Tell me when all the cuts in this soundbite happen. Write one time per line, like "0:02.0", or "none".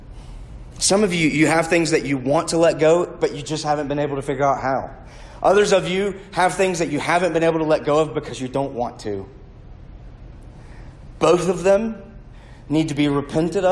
none